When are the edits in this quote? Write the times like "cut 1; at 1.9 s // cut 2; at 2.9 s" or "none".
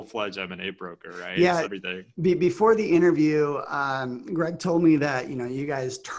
cut 1; at 1.6 s